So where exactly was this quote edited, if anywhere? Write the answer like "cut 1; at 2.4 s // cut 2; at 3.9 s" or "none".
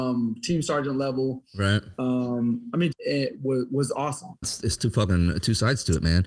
cut 1; at 2.9 s // cut 2; at 4.4 s